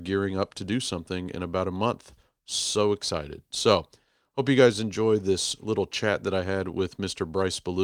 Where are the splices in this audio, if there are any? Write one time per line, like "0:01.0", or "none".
none